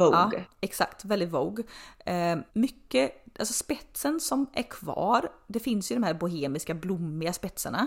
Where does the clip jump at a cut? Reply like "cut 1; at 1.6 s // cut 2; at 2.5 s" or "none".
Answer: cut 1; at 2.5 s